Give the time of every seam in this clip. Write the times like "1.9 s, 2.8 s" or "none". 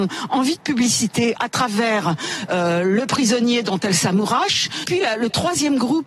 none